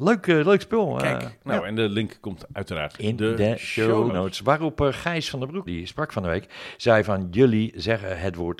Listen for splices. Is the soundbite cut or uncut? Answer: cut